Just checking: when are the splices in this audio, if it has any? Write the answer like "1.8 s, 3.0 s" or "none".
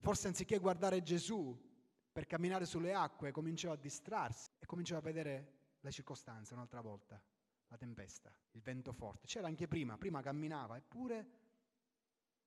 4.5 s, 8.4 s